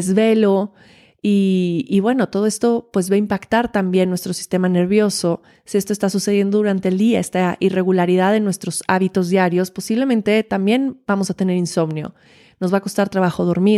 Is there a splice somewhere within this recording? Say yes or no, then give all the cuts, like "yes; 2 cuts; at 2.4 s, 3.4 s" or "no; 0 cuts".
no; 0 cuts